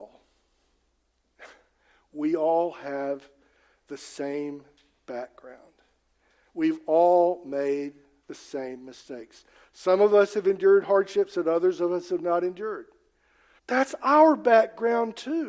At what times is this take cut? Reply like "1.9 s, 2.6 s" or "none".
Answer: 13.6 s

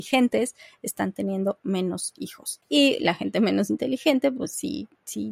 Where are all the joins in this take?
2.6 s

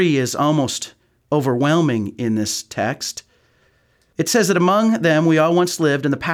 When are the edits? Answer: none

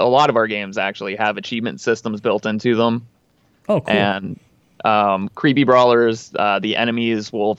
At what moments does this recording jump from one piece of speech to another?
none

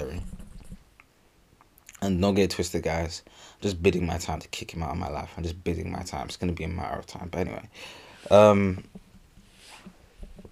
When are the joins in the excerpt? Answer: none

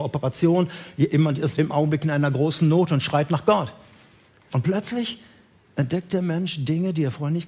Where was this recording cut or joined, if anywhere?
1.6 s, 4.5 s

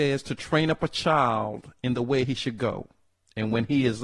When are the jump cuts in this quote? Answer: none

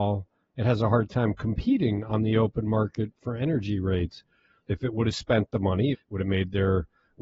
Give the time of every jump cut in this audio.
4.6 s, 5.9 s

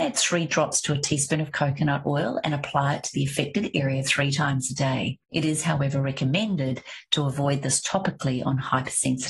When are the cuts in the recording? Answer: 5.2 s

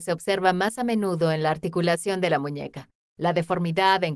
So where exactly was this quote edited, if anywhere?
3.0 s

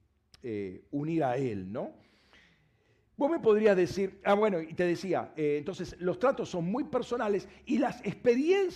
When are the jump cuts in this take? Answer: none

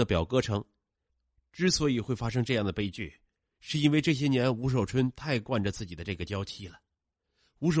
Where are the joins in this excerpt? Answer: none

